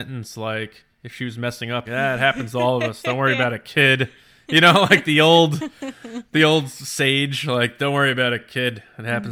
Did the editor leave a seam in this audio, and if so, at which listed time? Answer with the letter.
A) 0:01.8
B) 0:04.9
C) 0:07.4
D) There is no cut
A